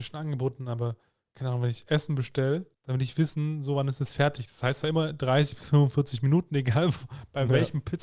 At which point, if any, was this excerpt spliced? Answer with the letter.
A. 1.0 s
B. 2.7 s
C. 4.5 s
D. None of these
B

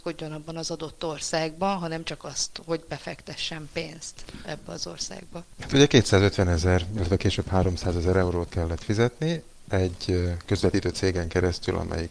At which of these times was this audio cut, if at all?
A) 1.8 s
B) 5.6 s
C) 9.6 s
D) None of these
B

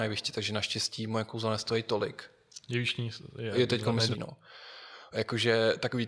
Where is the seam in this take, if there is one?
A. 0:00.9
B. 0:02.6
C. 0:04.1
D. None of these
C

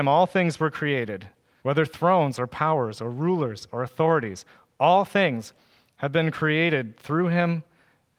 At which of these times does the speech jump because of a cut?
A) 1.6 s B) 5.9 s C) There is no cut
A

